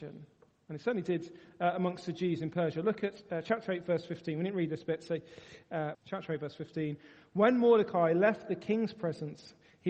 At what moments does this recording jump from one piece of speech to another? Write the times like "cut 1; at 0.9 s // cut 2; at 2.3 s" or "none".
cut 1; at 5.9 s